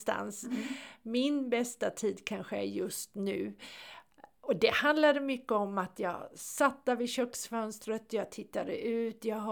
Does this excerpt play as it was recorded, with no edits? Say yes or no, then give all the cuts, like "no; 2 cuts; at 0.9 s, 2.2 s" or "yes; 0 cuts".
yes; 0 cuts